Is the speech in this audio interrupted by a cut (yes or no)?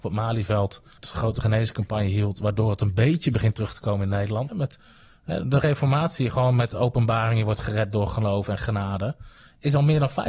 yes